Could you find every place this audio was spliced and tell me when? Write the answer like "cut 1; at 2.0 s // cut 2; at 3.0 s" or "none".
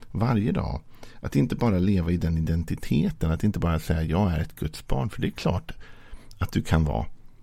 none